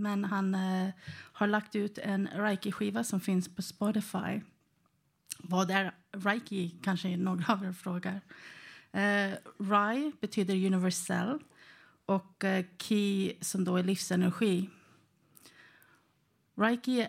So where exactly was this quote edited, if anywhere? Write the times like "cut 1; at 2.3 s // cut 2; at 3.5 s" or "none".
none